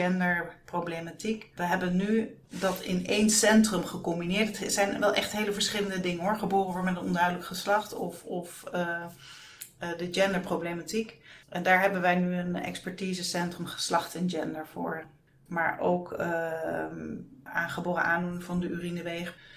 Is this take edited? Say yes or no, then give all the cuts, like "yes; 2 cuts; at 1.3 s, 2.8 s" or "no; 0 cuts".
yes; 3 cuts; at 2.4 s, 15.5 s, 17.5 s